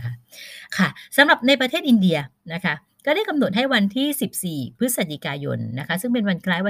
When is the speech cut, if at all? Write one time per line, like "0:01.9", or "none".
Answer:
none